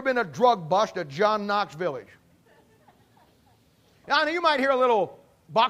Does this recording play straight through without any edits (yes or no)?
no